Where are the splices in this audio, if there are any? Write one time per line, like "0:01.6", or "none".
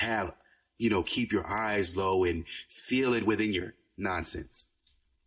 none